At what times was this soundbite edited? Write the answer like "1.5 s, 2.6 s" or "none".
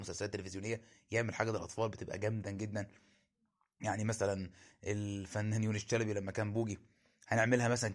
2.4 s